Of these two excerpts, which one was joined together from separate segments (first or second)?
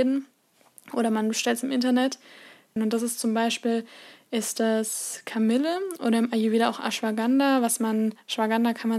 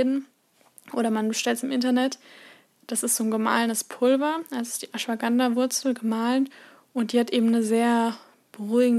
first